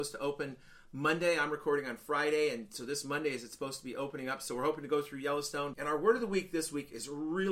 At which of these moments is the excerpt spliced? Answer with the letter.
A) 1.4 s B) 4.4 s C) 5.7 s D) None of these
C